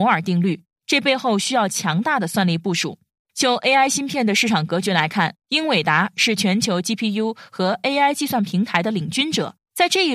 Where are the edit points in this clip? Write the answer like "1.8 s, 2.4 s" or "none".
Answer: none